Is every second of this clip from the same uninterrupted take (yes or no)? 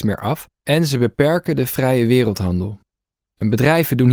yes